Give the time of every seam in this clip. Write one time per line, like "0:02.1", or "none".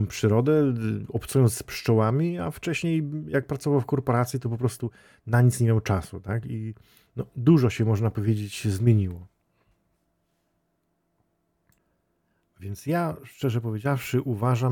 none